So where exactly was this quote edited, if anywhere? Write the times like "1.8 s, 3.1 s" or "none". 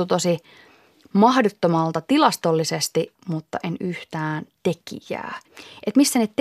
3.2 s